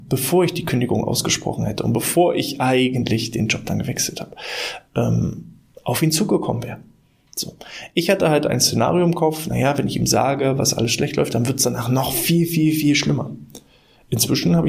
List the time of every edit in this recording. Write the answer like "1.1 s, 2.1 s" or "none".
none